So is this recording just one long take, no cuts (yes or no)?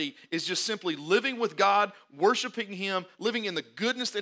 yes